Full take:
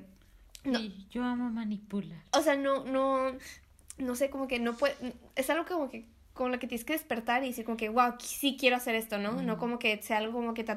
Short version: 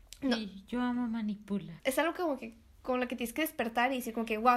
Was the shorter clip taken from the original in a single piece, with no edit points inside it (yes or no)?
no